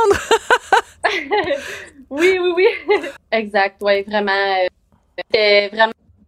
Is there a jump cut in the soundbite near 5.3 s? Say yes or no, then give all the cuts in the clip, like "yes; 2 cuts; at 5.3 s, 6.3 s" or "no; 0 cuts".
no; 1 cut; at 3.2 s